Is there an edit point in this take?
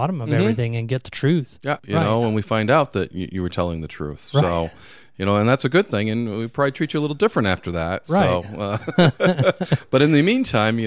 yes; 1 cut; at 1.8 s

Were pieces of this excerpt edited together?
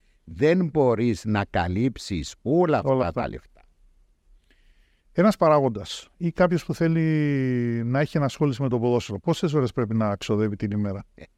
no; 0 cuts

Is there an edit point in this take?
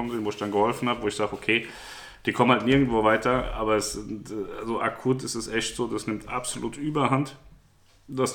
no; 0 cuts

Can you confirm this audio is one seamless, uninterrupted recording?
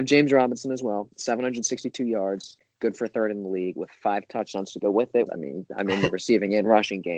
no; 1 cut; at 5.3 s

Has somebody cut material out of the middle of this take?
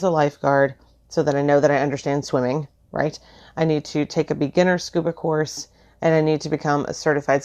no; 0 cuts

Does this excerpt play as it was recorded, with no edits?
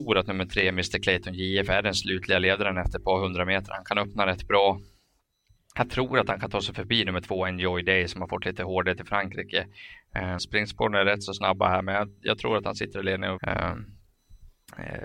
no; 2 cuts; at 10.4 s, 13.4 s

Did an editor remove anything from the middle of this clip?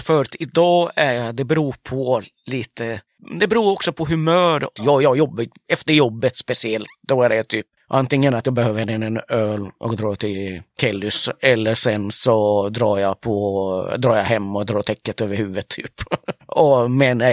yes; 1 cut; at 4.8 s

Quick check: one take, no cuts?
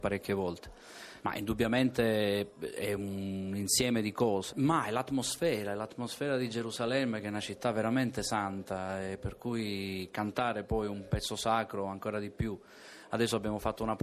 no; 2 cuts; at 1.2 s, 4.5 s

